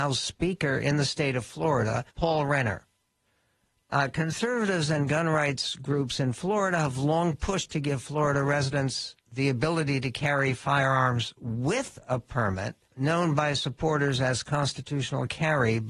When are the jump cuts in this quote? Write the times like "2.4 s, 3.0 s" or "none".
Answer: 2.1 s, 12.8 s